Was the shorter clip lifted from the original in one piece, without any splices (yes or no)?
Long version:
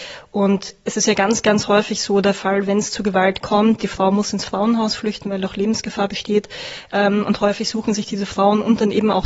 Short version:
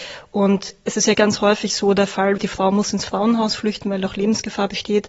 no